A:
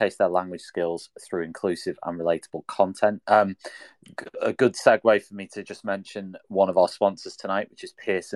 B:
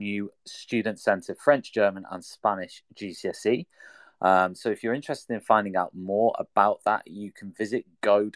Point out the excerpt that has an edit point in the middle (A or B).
A